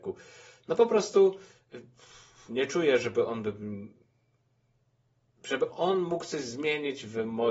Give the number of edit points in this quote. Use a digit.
0